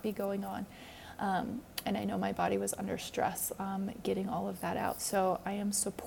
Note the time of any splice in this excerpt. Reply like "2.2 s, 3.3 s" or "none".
none